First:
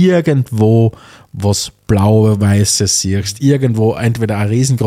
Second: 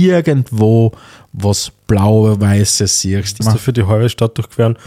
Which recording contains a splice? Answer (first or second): second